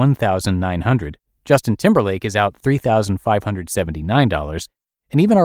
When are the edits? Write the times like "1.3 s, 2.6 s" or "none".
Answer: none